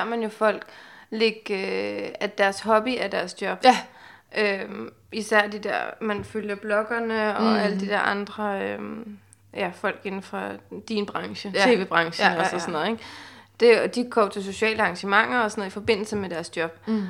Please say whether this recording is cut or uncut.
uncut